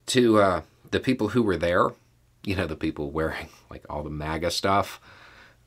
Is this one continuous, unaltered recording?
yes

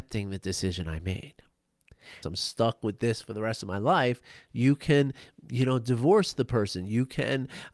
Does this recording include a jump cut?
yes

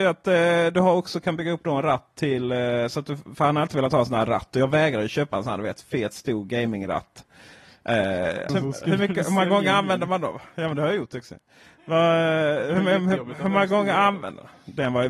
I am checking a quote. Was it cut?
yes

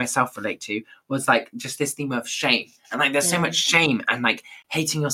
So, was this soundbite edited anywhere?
no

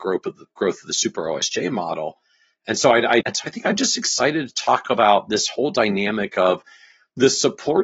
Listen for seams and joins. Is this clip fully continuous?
no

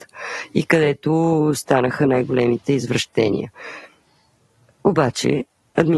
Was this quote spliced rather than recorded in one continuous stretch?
no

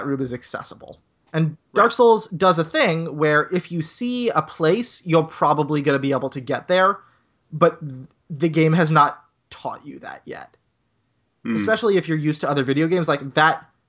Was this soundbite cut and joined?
no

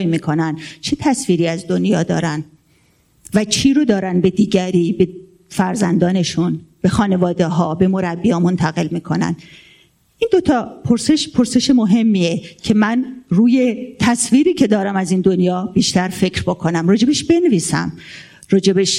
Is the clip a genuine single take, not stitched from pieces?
yes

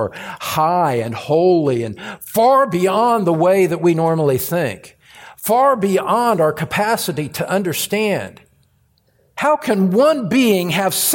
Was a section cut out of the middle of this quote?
no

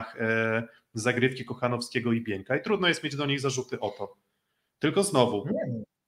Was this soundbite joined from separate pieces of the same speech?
no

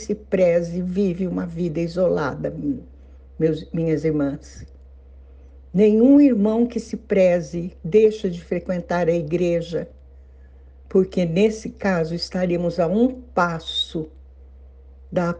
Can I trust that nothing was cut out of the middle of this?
yes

